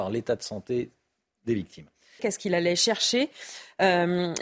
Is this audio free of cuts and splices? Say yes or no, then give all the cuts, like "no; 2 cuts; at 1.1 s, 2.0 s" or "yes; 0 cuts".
no; 1 cut; at 2.2 s